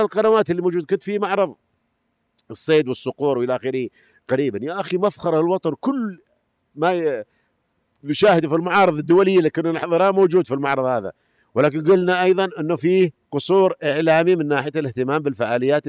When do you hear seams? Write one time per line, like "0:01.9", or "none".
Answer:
0:13.2

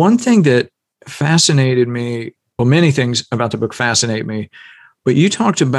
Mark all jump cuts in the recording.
none

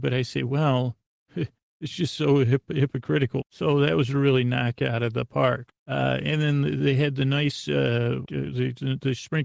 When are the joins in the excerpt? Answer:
0:03.4
0:05.7
0:08.3

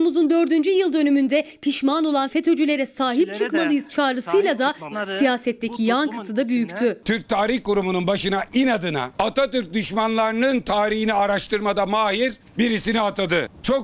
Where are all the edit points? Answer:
0:04.9

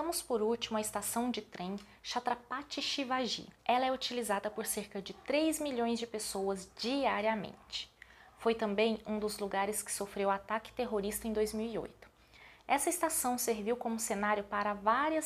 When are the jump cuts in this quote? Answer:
0:03.6

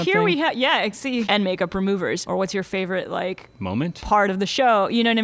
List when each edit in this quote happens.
0:01.2
0:02.2

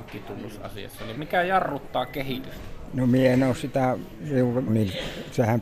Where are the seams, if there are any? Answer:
0:01.1
0:04.7

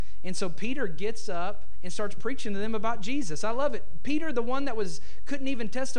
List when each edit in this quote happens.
none

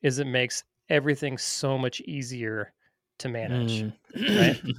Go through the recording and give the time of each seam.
none

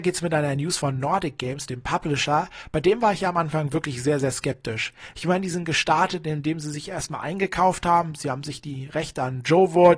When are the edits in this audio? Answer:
none

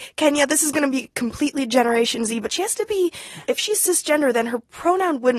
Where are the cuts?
0:03.4

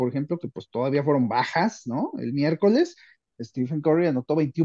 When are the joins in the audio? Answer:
none

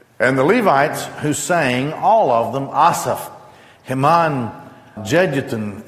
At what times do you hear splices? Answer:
0:05.0

